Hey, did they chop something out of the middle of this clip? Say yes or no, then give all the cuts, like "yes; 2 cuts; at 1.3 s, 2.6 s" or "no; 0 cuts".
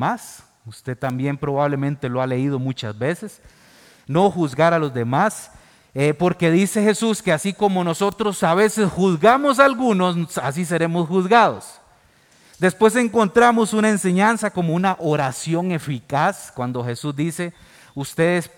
no; 0 cuts